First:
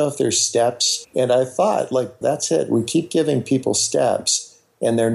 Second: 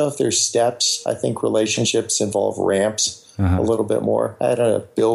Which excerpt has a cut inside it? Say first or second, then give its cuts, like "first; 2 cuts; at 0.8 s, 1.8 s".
first; 2 cuts; at 1.0 s, 2.2 s